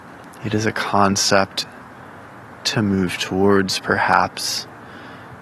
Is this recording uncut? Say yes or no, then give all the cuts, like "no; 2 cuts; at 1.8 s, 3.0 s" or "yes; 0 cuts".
yes; 0 cuts